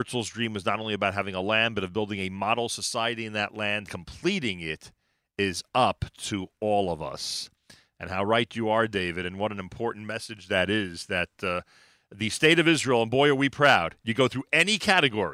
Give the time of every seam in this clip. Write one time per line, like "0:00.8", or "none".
0:03.9